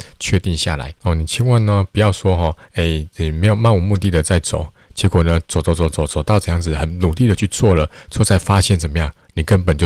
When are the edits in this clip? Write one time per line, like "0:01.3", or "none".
none